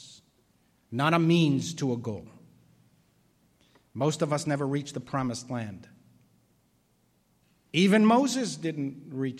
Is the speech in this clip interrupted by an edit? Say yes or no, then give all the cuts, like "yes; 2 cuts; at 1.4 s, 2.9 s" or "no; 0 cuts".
no; 0 cuts